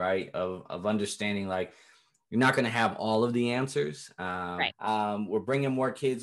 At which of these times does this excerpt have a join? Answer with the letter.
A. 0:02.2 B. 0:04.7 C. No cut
B